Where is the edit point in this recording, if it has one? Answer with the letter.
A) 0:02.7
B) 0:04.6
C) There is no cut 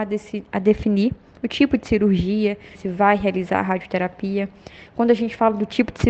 A